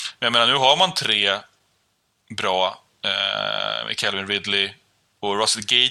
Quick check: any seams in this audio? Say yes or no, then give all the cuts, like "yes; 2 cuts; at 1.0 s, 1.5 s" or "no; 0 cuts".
no; 0 cuts